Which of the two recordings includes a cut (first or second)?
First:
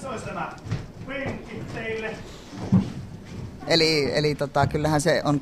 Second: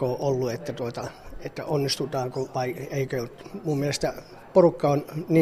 first